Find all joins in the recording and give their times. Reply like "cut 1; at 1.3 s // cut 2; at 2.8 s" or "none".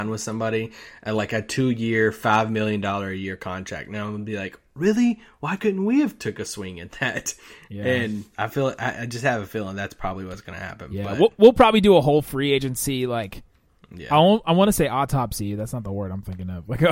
cut 1; at 8.3 s